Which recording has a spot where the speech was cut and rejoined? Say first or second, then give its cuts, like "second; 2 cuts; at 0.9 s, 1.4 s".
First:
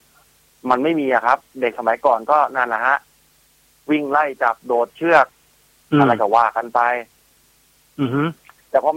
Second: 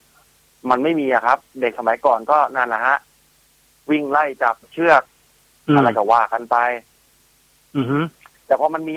second; 1 cut; at 4.6 s